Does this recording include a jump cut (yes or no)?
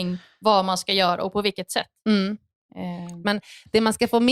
yes